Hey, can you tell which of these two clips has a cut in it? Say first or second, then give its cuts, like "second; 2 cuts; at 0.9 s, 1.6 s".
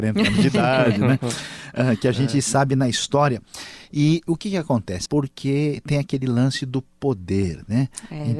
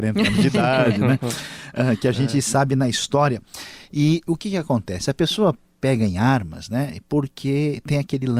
first; 1 cut; at 5.1 s